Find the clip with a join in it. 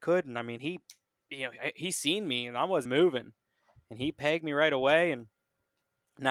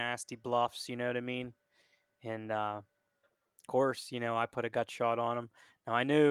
first; 1 cut; at 2.9 s

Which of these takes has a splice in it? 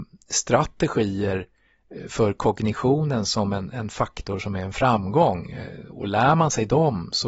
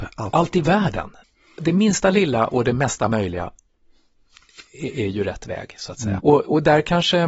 second; 2 cuts; at 1.6 s, 6.2 s

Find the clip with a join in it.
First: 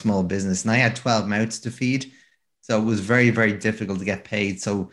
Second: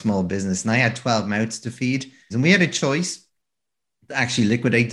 second; 1 cut; at 2.3 s

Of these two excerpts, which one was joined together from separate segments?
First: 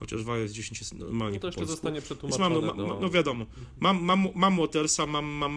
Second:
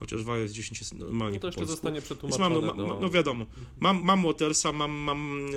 second; 1 cut; at 4.0 s

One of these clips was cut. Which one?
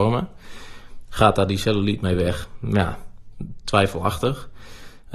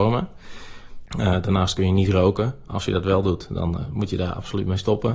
second; 1 cut; at 1.1 s

